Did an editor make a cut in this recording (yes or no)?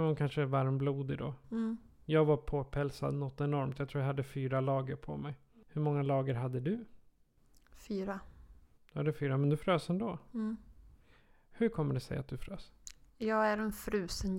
no